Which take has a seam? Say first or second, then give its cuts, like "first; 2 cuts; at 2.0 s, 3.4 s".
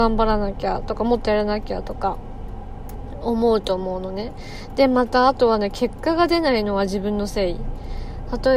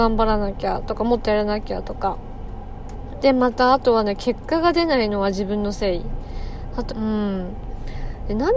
second; 2 cuts; at 3.2 s, 6.9 s